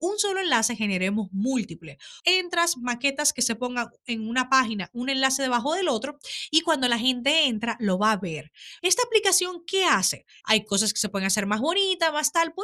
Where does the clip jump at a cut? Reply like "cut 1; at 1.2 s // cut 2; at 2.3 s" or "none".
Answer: cut 1; at 2.2 s // cut 2; at 8.8 s // cut 3; at 10.4 s